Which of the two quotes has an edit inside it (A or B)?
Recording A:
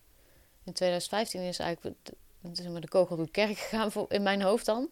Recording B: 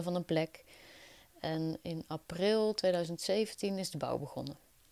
B